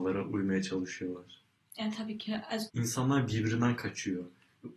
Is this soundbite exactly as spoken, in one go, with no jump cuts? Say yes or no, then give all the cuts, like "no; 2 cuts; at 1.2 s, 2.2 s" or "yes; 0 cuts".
no; 1 cut; at 2.7 s